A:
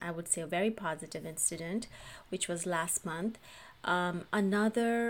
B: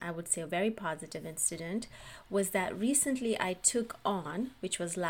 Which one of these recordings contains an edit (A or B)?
A